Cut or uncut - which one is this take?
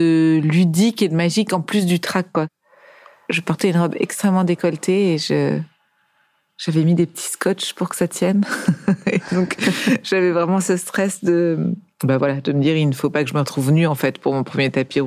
uncut